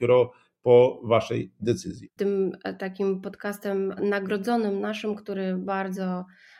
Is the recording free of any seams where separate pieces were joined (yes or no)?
no